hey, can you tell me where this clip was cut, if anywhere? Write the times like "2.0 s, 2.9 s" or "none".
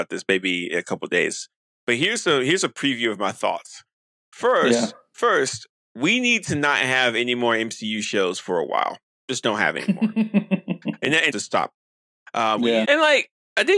11.3 s, 12.8 s